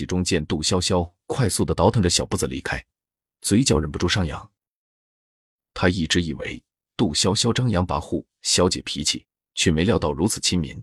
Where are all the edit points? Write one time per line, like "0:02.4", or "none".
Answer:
none